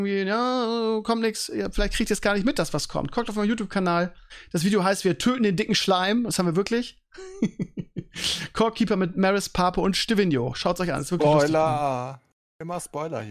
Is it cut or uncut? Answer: uncut